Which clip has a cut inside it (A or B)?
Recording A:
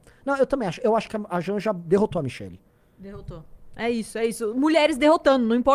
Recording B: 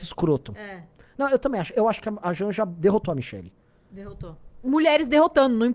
B